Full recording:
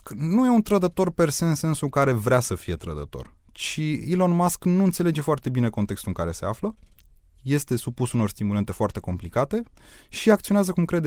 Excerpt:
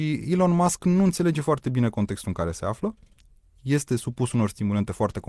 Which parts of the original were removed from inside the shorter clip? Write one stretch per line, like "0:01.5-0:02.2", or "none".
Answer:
none